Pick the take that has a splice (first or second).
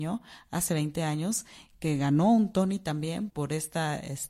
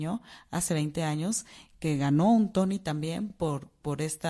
first